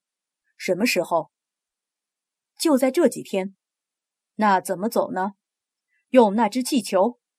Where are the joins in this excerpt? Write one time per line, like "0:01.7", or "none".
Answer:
none

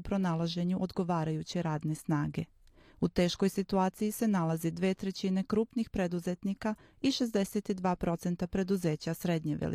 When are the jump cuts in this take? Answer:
none

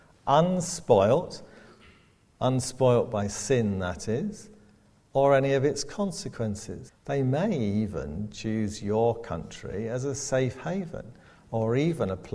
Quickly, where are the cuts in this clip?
0:06.9

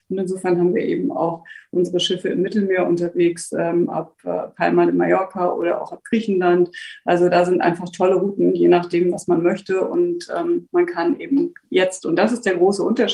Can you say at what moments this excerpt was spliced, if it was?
0:11.6

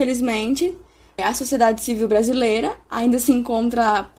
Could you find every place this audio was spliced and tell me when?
0:01.2

